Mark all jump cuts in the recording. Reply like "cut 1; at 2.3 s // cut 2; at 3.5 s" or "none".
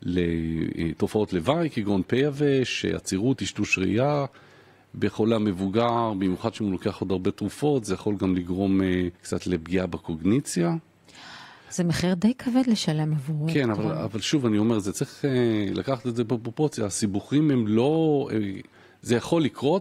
cut 1; at 9.1 s